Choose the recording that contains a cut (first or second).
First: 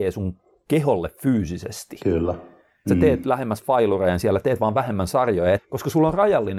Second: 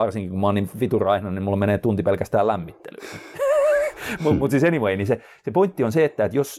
first